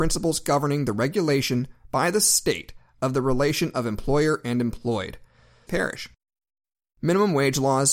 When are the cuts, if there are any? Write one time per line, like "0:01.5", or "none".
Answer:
0:05.7